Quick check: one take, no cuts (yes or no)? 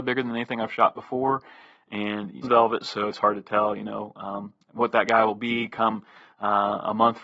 no